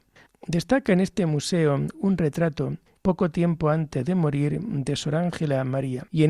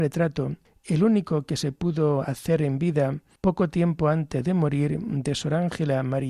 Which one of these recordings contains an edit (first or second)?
first